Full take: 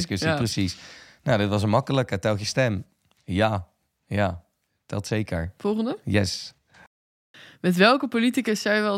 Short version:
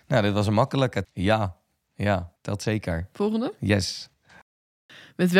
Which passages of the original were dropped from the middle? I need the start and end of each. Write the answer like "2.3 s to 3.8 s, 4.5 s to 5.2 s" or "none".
2.2 s to 3.2 s, 4.5 s to 4.8 s